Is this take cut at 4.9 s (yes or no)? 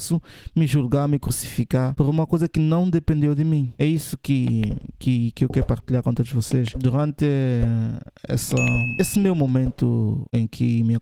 no